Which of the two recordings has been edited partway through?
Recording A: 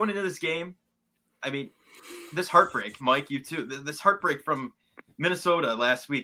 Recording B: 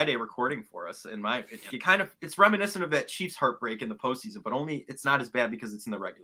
B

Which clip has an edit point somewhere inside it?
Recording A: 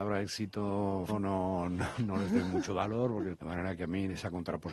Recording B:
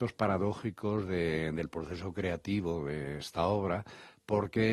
A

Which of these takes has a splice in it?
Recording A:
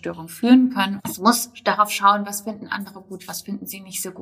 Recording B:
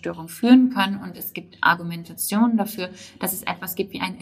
A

